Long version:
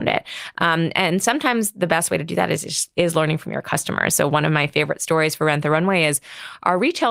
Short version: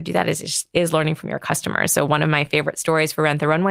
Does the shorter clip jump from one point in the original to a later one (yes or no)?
no